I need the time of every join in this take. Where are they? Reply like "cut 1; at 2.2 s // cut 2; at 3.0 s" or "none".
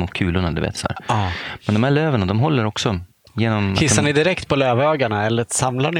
none